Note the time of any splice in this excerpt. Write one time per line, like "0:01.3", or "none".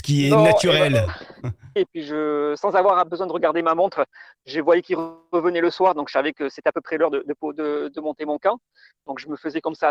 0:01.8